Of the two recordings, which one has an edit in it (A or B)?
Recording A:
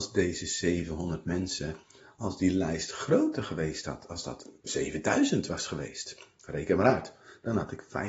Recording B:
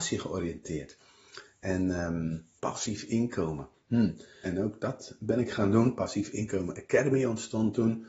B